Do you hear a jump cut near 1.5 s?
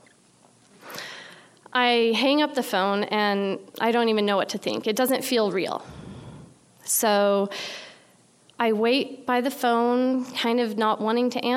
no; 0 cuts

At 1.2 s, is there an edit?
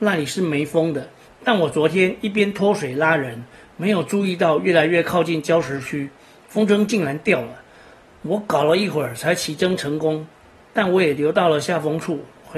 yes; 1 cut; at 1.2 s

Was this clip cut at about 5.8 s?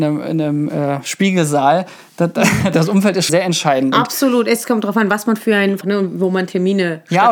yes; 2 cuts; at 3.3 s, 5.8 s

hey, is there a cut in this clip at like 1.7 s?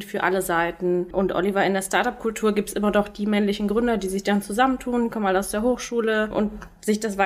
no; 0 cuts

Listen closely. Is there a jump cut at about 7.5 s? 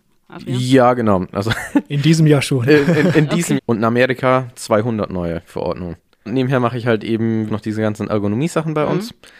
yes; 3 cuts; at 3.6 s, 6.3 s, 7.5 s

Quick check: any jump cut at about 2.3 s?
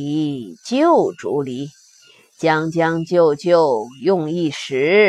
no; 0 cuts

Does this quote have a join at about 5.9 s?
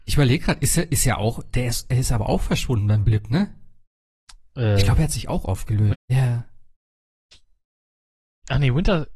yes; 1 cut; at 5.9 s

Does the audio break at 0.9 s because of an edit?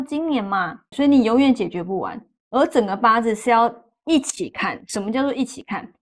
yes; 1 cut; at 0.9 s

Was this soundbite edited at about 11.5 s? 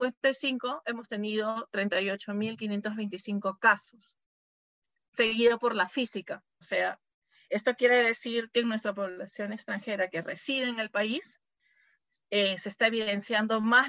no; 1 cut; at 6.6 s

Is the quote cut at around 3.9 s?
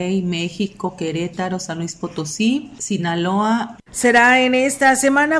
yes; 1 cut; at 3.9 s

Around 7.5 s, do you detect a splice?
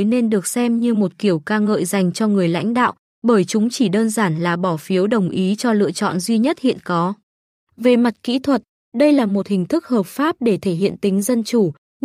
no; 0 cuts

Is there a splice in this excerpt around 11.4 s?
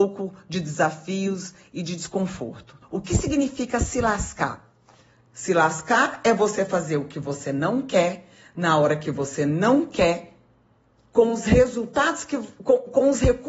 no; 1 cut; at 2.8 s

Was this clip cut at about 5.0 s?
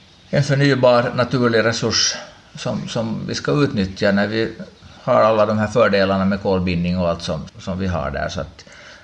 yes; 2 cuts; at 5.0 s, 7.5 s

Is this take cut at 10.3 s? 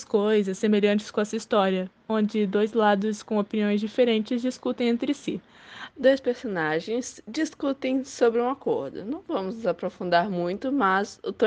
no; 1 cut; at 5.9 s

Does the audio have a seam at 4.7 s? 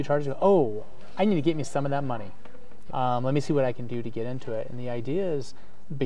no; 1 cut; at 2.9 s

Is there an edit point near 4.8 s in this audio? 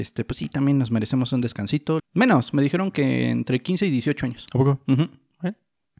no; 1 cut; at 2.0 s

